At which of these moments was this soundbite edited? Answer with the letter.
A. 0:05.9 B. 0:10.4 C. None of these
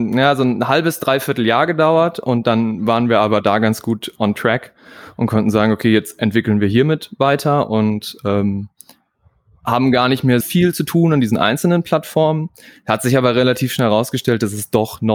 B